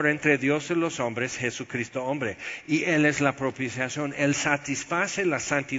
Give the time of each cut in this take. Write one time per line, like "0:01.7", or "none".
none